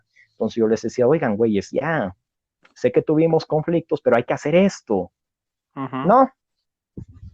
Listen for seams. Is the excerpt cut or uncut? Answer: uncut